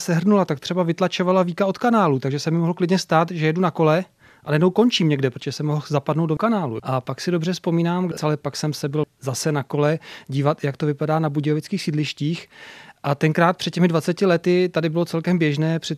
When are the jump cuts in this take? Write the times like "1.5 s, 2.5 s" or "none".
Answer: 6.8 s, 8.2 s